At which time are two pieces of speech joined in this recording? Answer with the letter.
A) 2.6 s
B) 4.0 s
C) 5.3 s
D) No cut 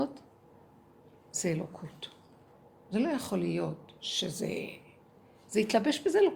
B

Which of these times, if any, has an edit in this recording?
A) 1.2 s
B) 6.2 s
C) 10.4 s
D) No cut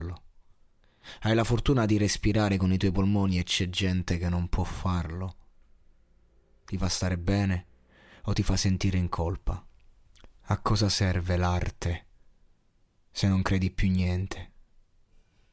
D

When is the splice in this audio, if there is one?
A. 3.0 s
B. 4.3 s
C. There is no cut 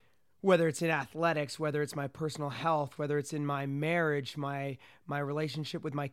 A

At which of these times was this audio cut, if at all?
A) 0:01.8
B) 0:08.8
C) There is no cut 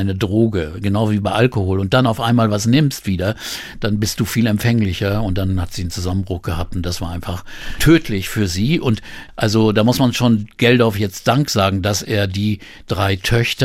C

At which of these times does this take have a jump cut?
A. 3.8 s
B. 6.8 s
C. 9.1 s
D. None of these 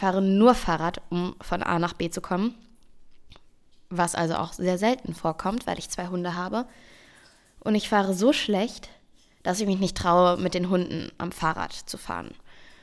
D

